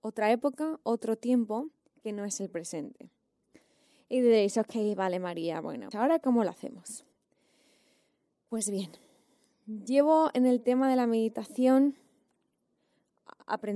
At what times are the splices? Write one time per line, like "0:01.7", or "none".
0:05.9